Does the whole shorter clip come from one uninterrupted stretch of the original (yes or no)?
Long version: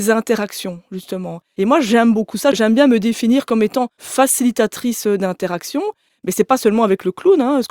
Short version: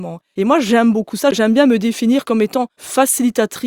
yes